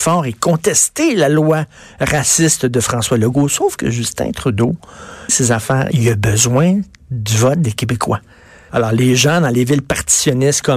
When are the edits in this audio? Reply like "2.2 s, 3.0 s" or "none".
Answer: 5.3 s, 8.7 s

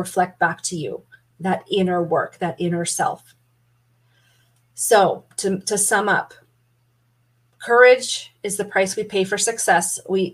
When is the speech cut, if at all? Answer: none

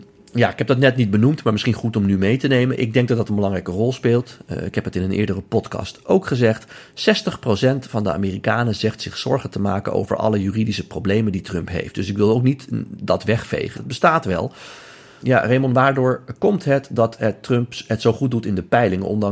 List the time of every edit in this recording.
13.7 s, 15.2 s

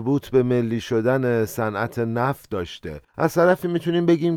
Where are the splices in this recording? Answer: 3.1 s

